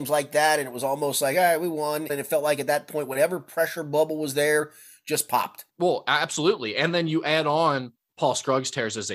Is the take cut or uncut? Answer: cut